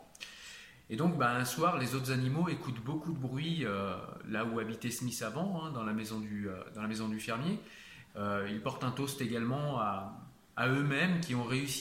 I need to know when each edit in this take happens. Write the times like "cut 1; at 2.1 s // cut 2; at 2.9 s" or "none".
cut 1; at 8.1 s